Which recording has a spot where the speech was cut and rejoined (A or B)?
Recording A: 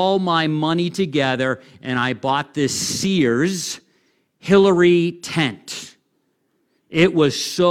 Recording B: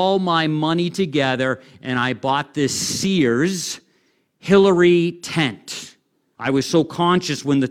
B